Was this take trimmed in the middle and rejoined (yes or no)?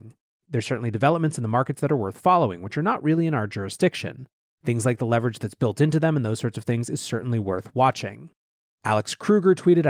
yes